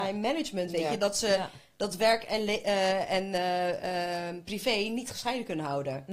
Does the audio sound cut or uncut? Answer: uncut